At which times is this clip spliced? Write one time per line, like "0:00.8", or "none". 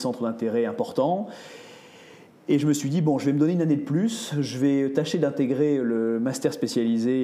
none